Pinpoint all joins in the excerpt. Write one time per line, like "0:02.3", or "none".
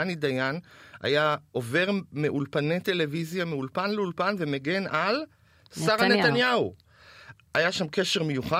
none

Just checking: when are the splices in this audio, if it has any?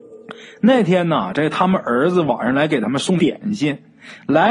0:03.2

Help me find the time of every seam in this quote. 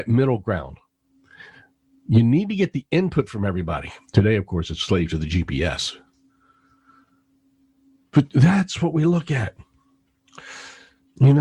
0:04.1

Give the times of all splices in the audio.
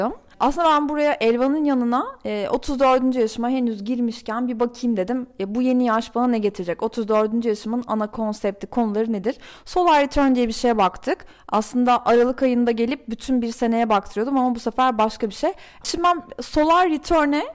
0:15.8

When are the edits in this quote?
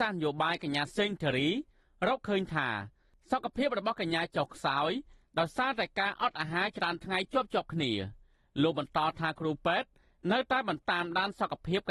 0:10.8

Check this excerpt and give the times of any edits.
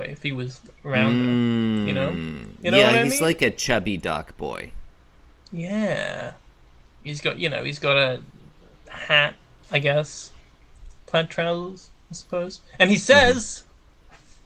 0:11.0

